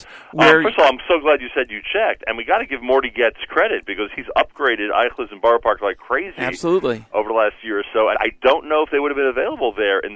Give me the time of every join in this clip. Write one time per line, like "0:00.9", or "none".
0:08.1